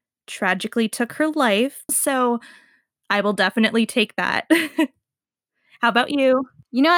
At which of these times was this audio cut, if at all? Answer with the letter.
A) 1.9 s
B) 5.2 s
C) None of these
A